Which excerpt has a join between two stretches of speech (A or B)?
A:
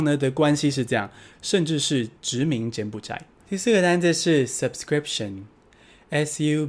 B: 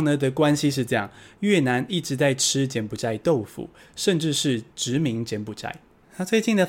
A